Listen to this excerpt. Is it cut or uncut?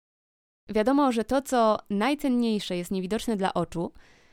uncut